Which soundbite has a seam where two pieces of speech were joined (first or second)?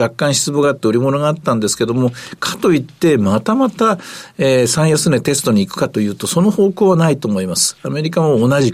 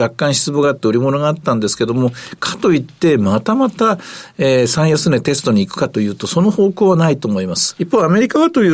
second